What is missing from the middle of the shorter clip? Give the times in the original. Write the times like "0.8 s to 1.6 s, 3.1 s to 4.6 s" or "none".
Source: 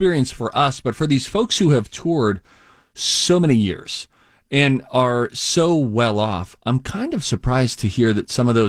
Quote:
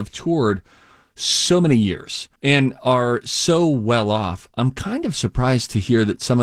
4.1 s to 4.4 s